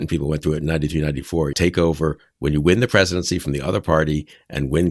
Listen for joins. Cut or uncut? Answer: cut